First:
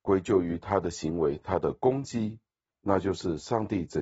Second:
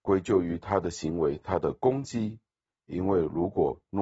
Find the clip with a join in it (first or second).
first